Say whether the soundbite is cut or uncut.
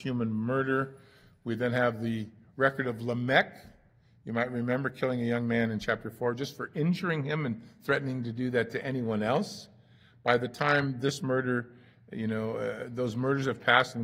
uncut